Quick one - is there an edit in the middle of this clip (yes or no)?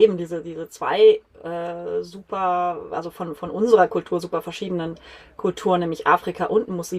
no